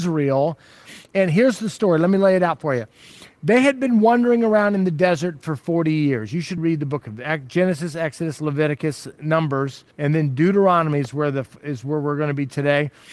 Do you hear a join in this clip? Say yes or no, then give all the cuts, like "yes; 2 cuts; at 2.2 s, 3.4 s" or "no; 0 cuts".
yes; 2 cuts; at 6.6 s, 9.9 s